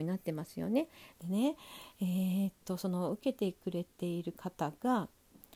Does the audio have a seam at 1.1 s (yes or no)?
yes